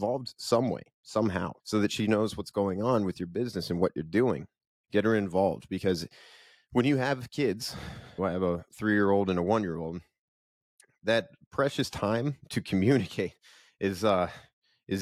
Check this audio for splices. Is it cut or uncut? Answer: cut